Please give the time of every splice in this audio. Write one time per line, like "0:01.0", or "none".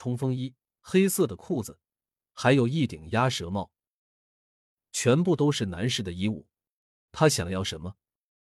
0:07.1